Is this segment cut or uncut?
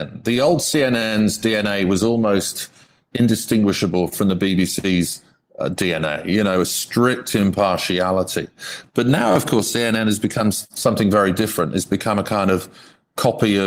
uncut